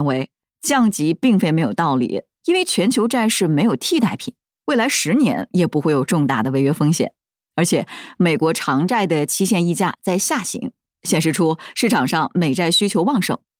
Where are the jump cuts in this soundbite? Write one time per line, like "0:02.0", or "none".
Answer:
0:02.3

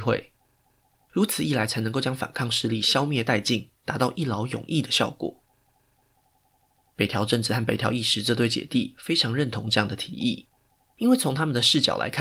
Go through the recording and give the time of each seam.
0:01.0

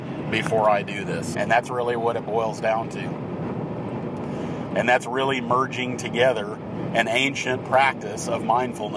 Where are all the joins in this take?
0:01.3
0:04.7

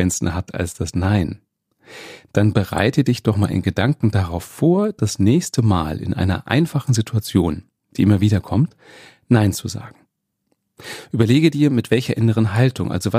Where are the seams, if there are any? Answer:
none

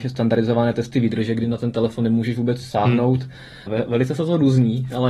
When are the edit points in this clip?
0:03.7

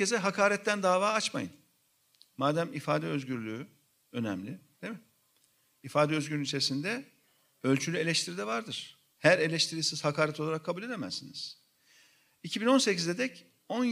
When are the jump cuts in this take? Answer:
none

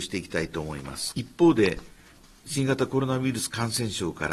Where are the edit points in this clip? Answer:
0:01.1

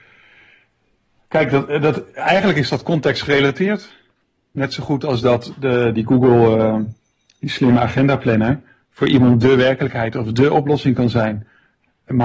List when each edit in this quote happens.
0:05.9

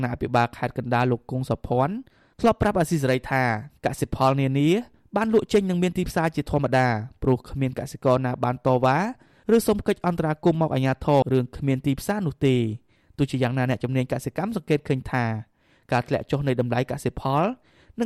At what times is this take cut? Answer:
0:11.2

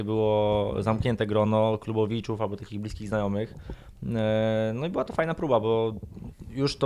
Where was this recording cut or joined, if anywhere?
none

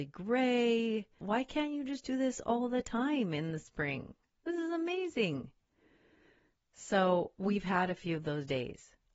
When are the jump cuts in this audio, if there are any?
0:01.2

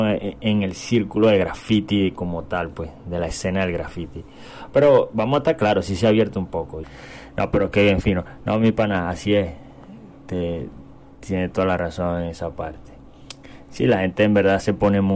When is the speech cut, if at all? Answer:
0:06.8

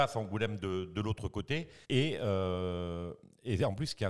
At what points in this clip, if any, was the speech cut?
0:01.8

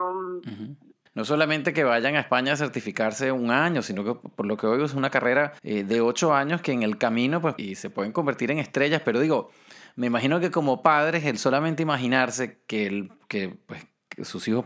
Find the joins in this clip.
0:01.1
0:05.6
0:07.6

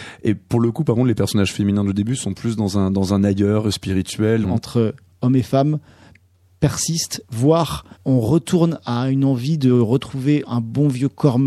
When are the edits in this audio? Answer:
0:04.4
0:07.9

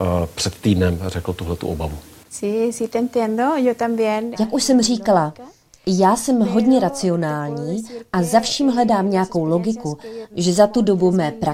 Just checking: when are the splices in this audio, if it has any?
0:04.3
0:10.3

